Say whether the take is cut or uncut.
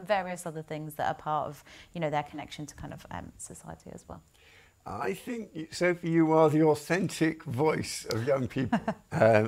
uncut